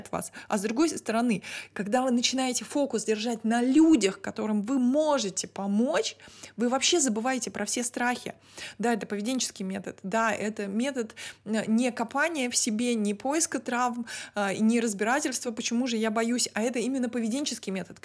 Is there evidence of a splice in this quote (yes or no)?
no